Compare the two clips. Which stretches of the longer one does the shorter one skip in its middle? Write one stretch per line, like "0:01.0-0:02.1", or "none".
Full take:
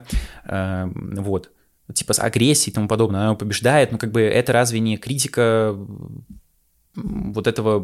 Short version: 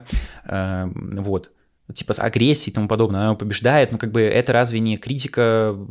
none